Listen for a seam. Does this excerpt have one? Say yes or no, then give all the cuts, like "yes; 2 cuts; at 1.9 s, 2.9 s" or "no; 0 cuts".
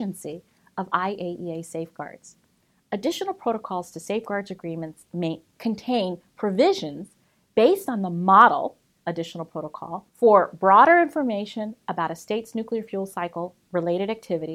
yes; 1 cut; at 10.1 s